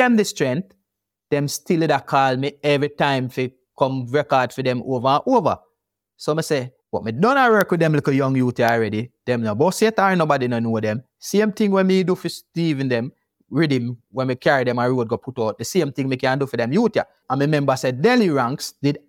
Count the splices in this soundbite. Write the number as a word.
two